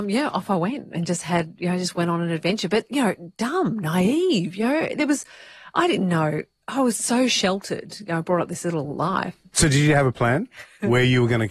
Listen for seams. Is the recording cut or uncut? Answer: uncut